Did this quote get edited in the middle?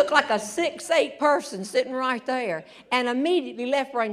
no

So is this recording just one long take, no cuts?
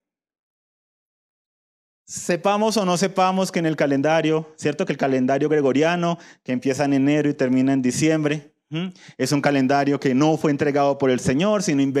yes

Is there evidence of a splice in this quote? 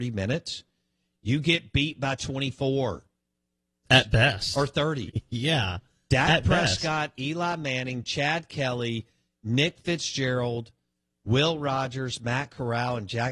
yes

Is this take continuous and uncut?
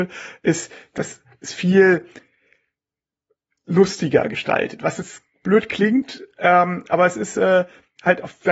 yes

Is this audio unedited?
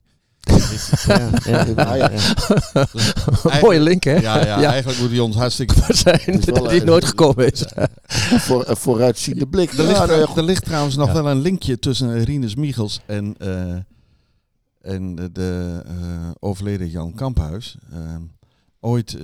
no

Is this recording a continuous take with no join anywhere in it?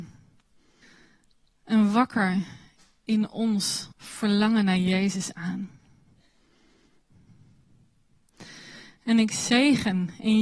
no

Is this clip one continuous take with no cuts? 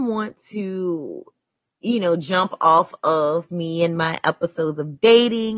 yes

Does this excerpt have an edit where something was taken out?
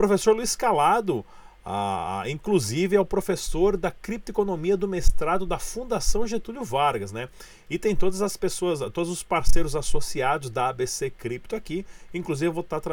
no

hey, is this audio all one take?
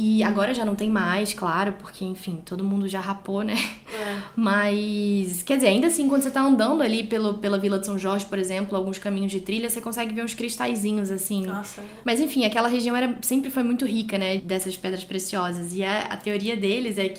no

